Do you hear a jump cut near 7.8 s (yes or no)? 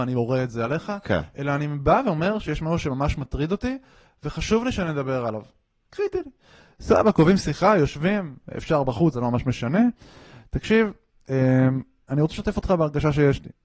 no